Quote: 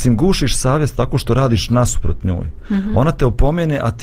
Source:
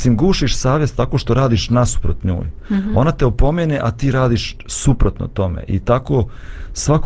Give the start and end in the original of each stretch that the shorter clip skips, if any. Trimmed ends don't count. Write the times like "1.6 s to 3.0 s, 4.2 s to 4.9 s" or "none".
none